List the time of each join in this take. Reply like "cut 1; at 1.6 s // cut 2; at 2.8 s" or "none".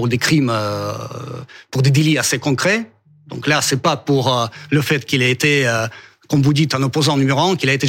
none